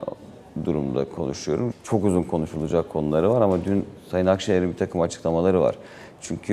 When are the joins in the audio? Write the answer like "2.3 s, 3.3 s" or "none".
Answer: 1.7 s